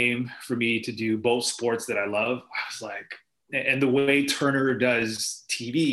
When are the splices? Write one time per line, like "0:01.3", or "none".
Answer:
0:03.5